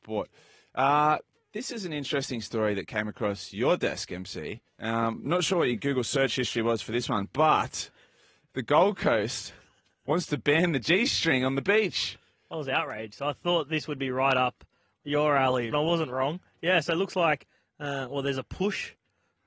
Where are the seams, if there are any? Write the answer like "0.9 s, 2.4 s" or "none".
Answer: 4.7 s, 15.7 s

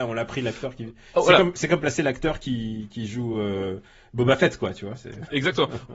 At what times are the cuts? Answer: none

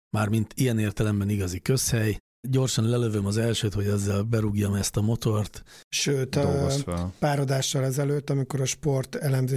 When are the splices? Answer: 5.8 s

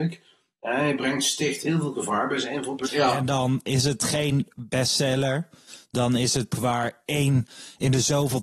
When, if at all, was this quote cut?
2.8 s, 6.5 s

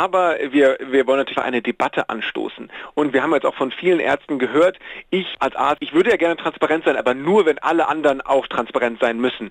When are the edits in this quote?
1.4 s

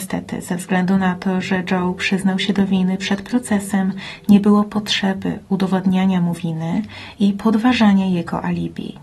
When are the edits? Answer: none

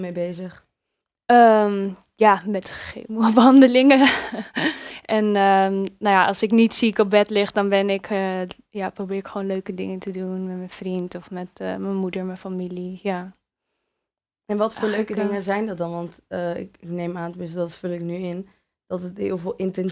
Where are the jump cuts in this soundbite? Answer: none

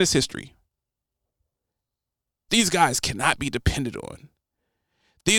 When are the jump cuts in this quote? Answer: 2.5 s

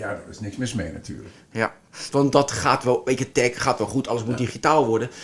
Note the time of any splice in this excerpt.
2.1 s

